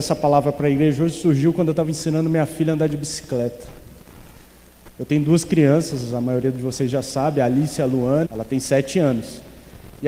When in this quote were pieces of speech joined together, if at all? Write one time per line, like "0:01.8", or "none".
0:08.2